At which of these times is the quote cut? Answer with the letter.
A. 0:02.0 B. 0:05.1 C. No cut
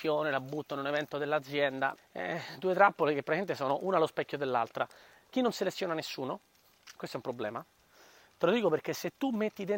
A